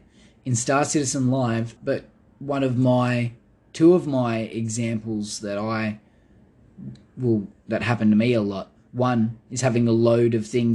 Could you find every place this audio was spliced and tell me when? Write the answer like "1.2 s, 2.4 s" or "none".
1.8 s